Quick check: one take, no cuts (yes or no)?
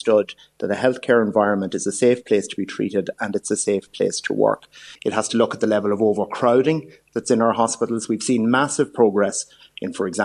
no